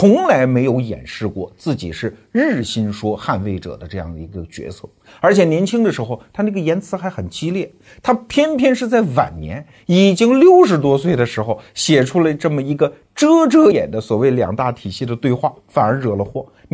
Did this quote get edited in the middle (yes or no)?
yes